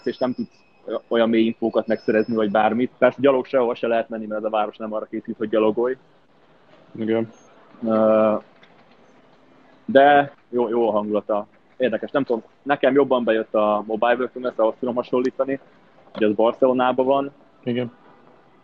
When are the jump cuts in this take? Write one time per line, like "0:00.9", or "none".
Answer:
0:02.9
0:10.3